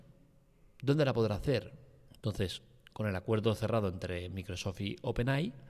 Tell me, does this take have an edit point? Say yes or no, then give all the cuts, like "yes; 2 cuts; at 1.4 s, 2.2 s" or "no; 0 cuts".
yes; 1 cut; at 2.1 s